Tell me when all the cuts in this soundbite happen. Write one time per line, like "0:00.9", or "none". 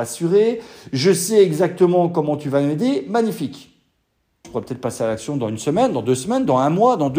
0:04.4